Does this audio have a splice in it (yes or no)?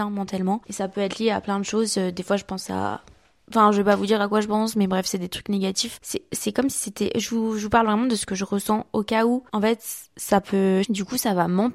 yes